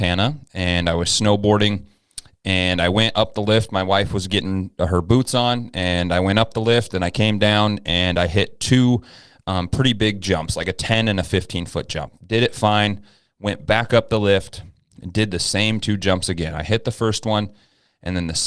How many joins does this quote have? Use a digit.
0